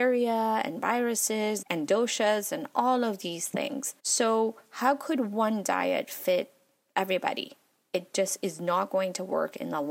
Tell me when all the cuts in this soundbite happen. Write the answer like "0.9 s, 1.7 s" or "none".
1.6 s, 4.0 s